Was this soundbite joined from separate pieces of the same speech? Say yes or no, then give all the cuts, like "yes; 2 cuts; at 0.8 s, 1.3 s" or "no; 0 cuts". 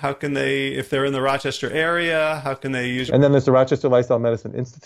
yes; 1 cut; at 3.1 s